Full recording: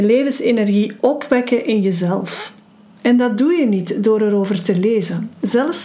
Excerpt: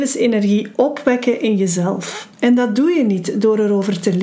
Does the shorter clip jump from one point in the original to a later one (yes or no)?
yes